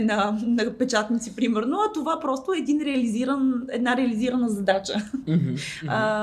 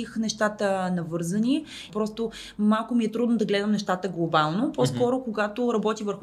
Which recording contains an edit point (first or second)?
second